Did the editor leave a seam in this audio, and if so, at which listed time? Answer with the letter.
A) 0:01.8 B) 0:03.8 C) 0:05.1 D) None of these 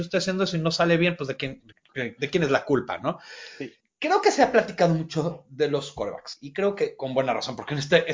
B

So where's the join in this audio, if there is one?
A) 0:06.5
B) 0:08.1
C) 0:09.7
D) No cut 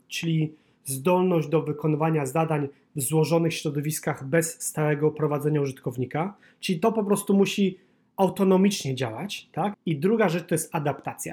C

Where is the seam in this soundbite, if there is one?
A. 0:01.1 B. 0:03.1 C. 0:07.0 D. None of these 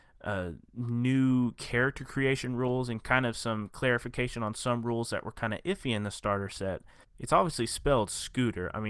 C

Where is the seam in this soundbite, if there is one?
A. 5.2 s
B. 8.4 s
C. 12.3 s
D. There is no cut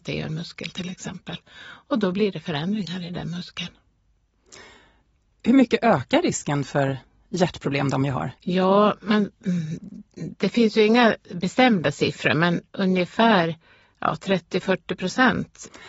B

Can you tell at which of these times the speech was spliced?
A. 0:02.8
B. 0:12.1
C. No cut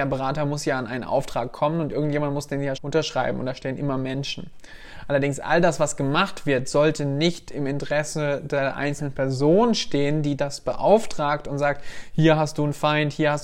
A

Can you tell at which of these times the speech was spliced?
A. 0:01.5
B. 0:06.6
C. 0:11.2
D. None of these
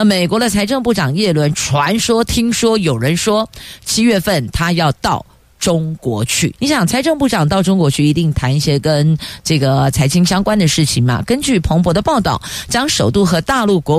B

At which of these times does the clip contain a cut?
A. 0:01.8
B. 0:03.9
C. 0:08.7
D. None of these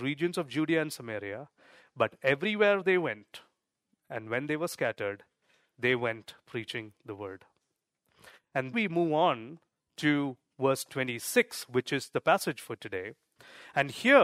C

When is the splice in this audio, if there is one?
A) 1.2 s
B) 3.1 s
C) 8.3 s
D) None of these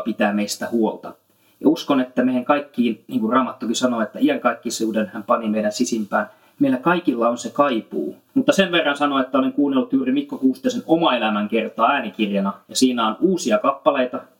C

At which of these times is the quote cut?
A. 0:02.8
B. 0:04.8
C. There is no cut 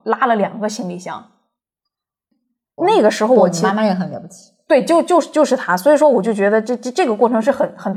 A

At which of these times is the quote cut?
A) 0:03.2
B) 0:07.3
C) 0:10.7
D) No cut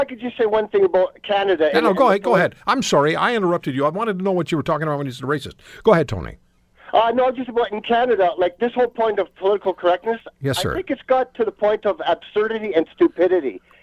D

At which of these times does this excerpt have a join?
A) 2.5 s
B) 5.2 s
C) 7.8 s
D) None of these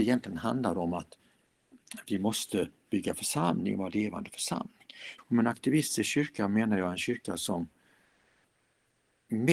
B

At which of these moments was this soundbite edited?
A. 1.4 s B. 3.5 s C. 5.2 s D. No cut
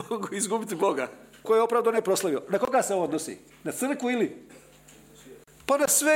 A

